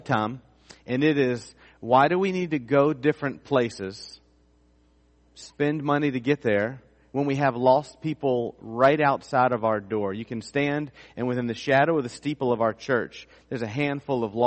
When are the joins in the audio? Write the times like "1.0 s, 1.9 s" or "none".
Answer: none

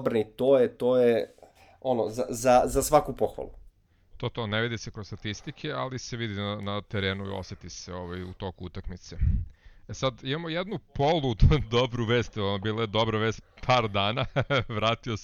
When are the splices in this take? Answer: none

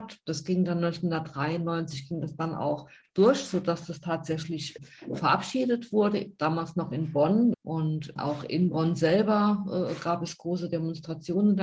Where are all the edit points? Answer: 7.5 s

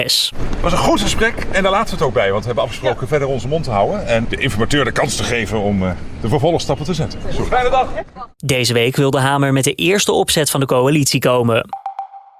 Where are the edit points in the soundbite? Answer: 4.2 s, 7.5 s

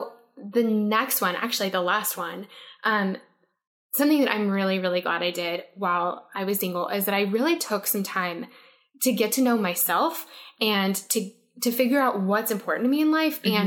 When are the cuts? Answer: none

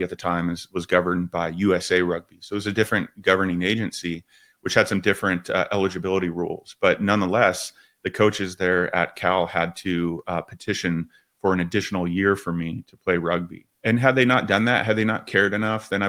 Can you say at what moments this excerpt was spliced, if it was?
13.7 s

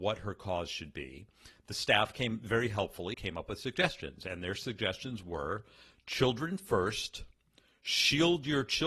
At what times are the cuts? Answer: 3.1 s

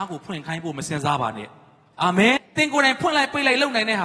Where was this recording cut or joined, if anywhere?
2.4 s

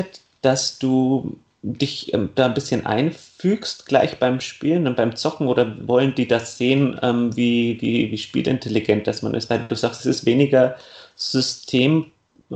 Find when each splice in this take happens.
none

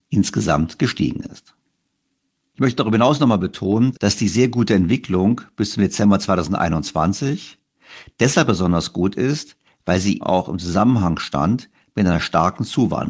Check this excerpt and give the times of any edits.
3.9 s, 10.2 s

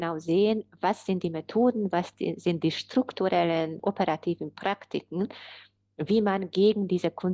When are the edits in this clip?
3.8 s

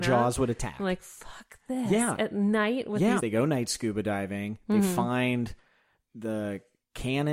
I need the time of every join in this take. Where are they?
3.2 s

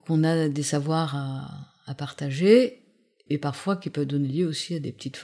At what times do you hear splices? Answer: 3.3 s

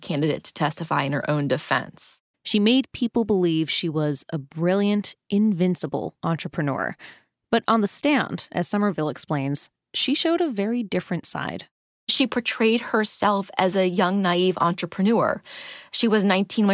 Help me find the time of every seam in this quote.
2.3 s

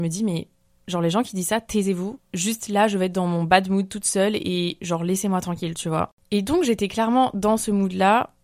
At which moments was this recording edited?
none

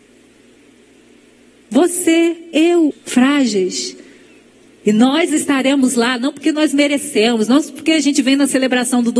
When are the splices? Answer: 2.9 s, 4.8 s

